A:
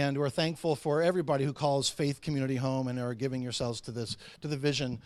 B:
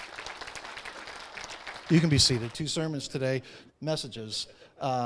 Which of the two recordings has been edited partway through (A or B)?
B